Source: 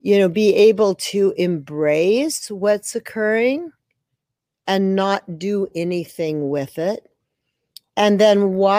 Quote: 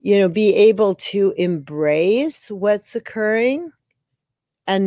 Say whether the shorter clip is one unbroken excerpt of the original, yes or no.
yes